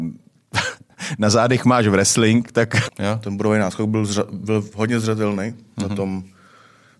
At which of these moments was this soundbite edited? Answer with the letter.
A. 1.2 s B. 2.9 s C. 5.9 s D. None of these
B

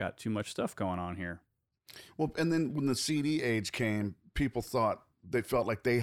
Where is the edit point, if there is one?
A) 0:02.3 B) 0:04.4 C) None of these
C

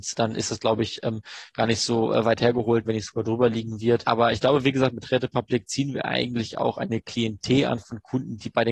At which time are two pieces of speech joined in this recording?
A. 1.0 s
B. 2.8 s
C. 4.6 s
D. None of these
B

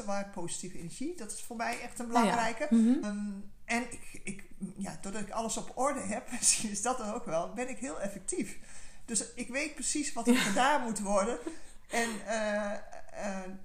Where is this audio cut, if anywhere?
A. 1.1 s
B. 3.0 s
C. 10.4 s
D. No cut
B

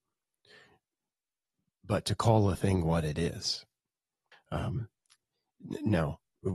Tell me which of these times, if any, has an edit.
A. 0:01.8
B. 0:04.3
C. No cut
B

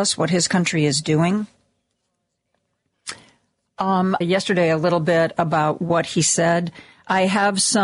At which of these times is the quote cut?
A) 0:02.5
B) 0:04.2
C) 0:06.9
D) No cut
B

